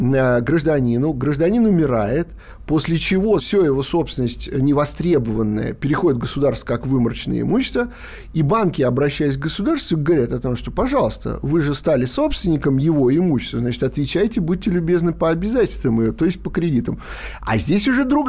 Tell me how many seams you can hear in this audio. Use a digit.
1